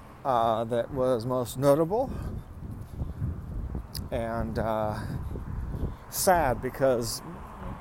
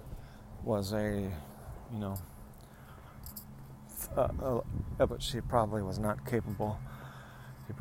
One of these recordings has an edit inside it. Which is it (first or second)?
second